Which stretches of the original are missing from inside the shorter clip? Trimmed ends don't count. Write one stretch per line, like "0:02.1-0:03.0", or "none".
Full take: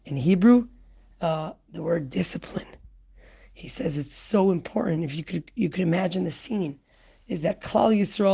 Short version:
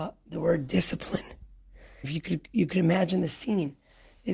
0:03.5-0:05.1